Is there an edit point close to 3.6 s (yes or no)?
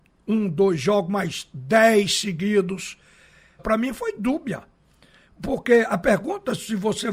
yes